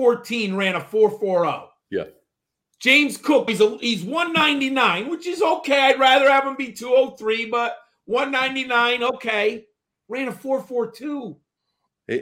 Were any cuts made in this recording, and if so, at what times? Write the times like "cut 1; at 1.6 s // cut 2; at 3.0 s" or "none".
cut 1; at 3.5 s